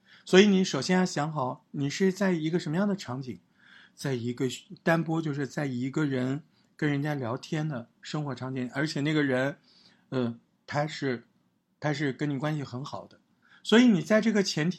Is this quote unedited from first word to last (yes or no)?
yes